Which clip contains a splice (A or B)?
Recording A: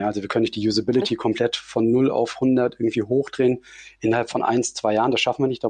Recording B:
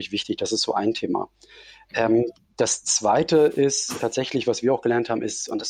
B